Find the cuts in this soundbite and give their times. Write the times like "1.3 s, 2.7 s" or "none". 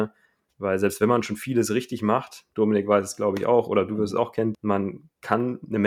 2.5 s, 4.5 s